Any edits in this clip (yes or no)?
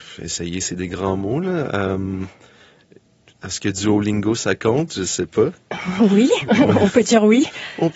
no